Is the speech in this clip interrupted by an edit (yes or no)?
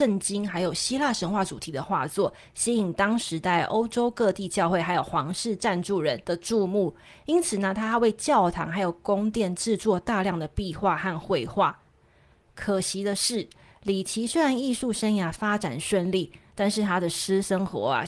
no